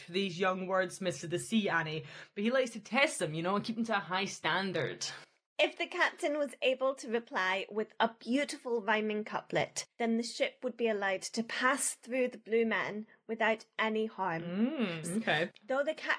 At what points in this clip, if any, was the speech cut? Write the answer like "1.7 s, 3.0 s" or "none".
15.0 s